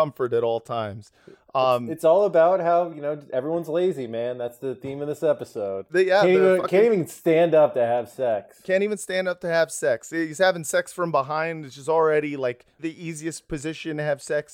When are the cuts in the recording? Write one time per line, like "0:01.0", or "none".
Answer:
0:05.9
0:12.8